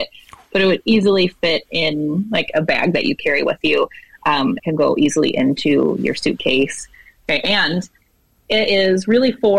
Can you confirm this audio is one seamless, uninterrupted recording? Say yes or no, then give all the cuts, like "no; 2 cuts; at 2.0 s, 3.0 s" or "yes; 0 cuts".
no; 1 cut; at 4.6 s